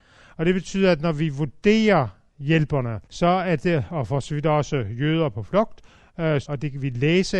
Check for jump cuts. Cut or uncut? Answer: cut